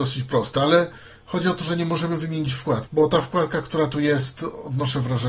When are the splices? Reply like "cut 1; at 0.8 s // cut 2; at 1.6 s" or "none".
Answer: cut 1; at 2.9 s